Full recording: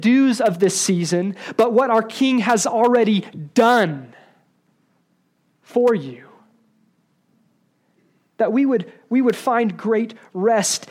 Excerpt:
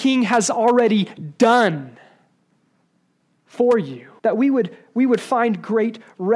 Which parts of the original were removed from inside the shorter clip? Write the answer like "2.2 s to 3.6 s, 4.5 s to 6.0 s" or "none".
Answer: 6.3 s to 8.3 s